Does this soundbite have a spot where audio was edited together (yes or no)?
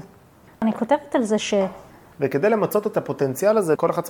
yes